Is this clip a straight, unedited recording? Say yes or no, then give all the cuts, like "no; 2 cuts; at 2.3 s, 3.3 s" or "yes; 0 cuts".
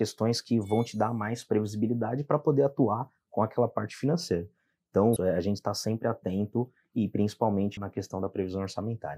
no; 2 cuts; at 5.2 s, 7.8 s